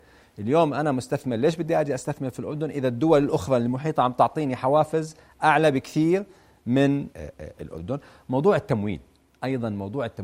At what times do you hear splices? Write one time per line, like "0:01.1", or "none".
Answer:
0:07.1